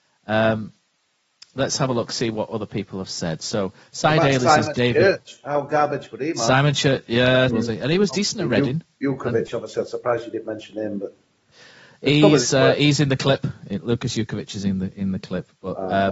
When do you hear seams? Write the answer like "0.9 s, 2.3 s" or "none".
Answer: 7.5 s